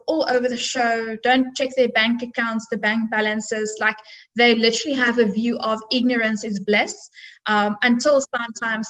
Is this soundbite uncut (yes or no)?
yes